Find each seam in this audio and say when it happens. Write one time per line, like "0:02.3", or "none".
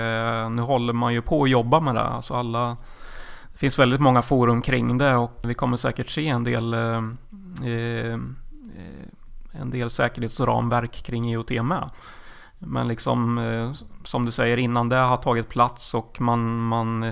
0:05.4

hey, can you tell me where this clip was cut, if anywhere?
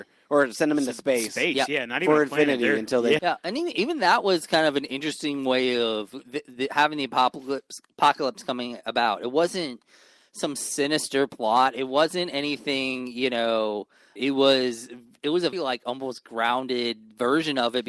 0:03.2
0:14.2
0:15.5

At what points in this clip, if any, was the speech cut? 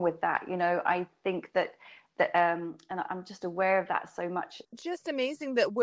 0:04.6

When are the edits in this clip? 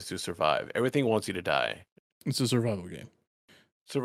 0:02.1

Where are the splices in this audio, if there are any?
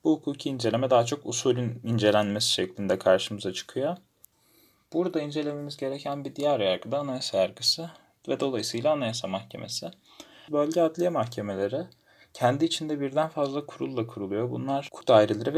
0:10.5

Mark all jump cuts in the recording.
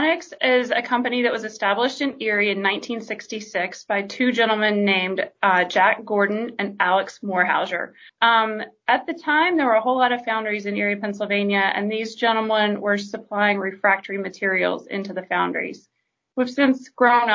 0:08.1

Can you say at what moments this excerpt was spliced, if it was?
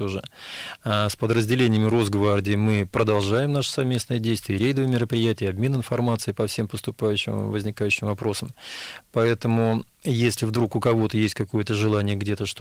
none

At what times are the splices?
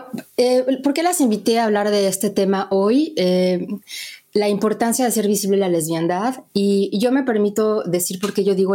none

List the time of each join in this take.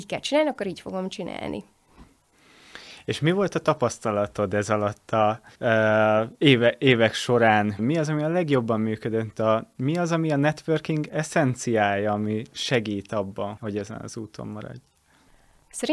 0:05.5
0:07.8
0:13.6

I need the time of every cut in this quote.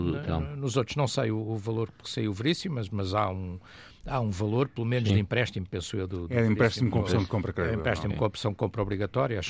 none

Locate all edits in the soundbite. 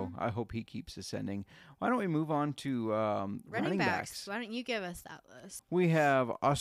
0:05.6

